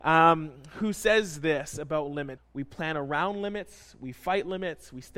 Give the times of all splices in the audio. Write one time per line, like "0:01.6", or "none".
0:02.4